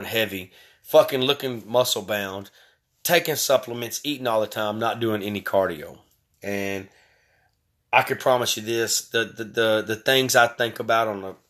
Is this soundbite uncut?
yes; 0 cuts

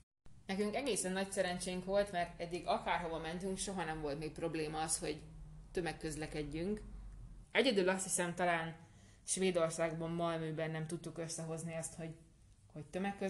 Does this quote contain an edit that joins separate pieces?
yes; 1 cut; at 7.4 s

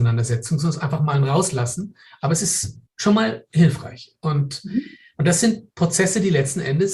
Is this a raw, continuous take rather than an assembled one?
no; 1 cut; at 2.9 s

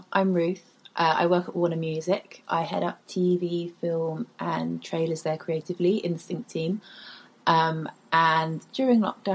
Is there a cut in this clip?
no; 0 cuts

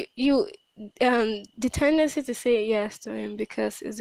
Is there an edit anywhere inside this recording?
no; 0 cuts

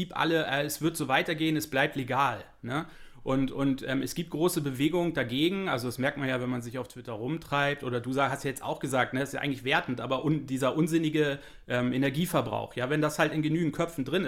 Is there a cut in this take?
no; 0 cuts

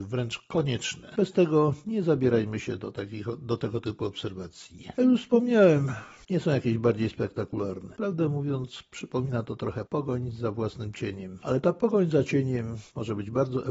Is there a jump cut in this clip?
yes; 1 cut; at 6.3 s

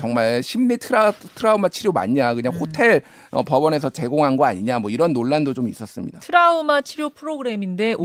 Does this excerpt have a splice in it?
no; 0 cuts

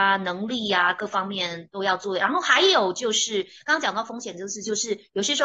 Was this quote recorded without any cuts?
yes; 0 cuts

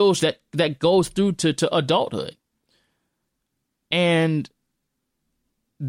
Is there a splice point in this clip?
no; 0 cuts

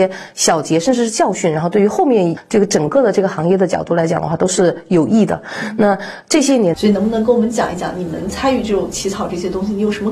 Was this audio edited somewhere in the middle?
yes; 1 cut; at 6.7 s

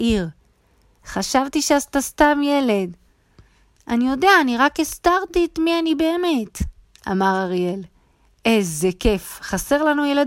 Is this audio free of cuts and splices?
no; 1 cut; at 1.0 s

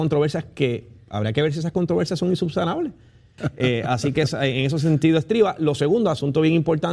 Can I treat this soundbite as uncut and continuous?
no; 1 cut; at 3.4 s

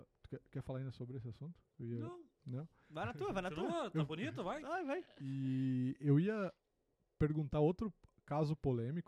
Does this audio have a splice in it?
no; 0 cuts

